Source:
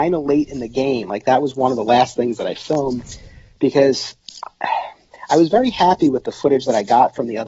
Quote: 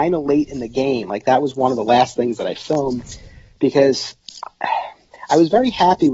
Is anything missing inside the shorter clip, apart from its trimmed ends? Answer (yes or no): no